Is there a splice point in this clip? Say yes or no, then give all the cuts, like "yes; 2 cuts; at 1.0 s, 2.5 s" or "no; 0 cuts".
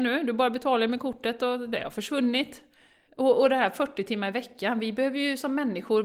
yes; 1 cut; at 3.1 s